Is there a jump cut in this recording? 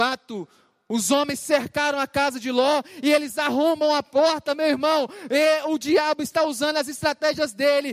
no; 0 cuts

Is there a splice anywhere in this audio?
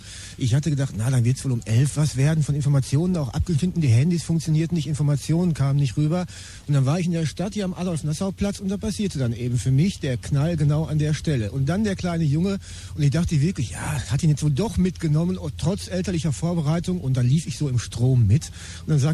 no; 0 cuts

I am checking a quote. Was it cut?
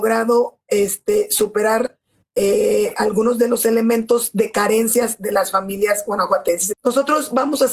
yes; 2 cuts; at 2.9 s, 6.7 s

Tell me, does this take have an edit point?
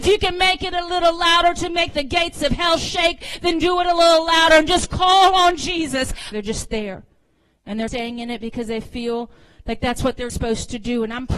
yes; 3 cuts; at 6.3 s, 7.9 s, 10.3 s

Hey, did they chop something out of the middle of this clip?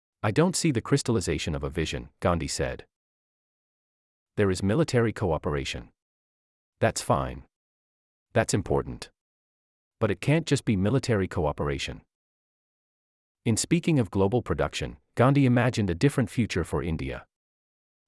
no; 0 cuts

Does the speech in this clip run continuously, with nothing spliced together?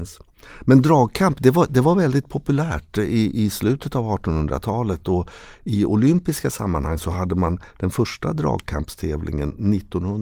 yes; 0 cuts

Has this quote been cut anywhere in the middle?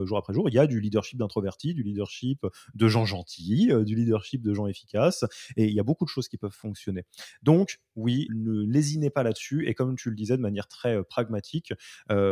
yes; 1 cut; at 8.3 s

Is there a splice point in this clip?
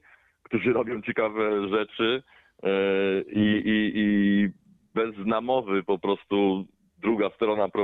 no; 0 cuts

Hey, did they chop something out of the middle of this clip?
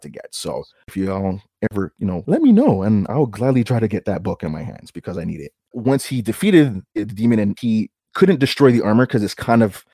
yes; 2 cuts; at 2.2 s, 5.7 s

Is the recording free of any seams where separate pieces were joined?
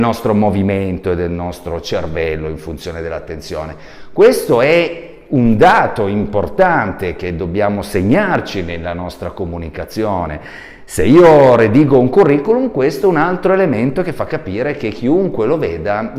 yes; 0 cuts

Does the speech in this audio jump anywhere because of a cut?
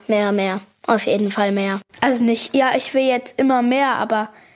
no; 0 cuts

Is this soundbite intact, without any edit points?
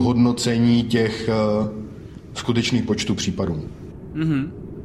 yes; 0 cuts

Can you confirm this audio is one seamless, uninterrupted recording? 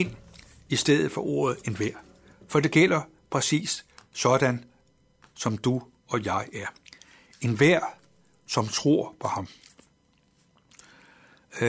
yes; 0 cuts

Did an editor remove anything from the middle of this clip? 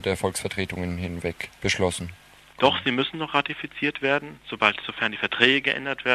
no; 0 cuts

